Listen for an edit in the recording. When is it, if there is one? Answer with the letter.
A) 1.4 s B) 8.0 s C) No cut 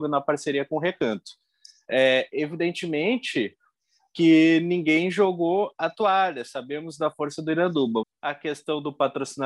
B